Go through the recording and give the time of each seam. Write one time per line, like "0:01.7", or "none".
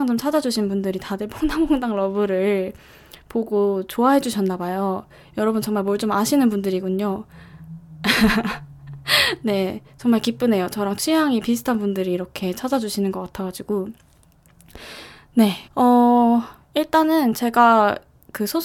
0:15.7